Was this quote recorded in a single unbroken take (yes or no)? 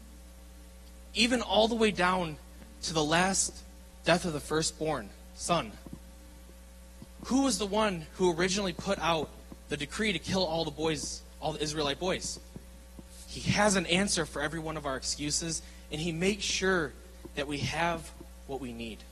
no